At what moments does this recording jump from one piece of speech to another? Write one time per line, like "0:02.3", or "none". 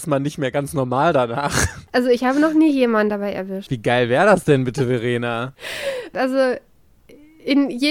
0:03.7
0:06.1